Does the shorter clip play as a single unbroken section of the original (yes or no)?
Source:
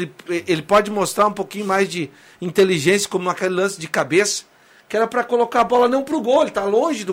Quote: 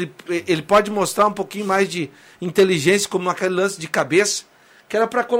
yes